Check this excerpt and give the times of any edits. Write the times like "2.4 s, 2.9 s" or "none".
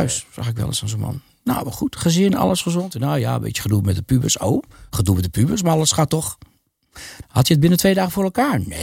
7.2 s